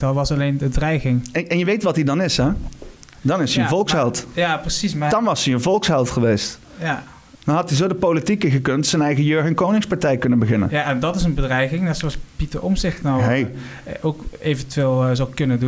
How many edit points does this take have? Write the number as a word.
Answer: one